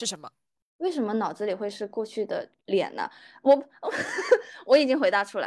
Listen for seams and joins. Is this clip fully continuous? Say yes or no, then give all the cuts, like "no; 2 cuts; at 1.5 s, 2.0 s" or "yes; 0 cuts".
yes; 0 cuts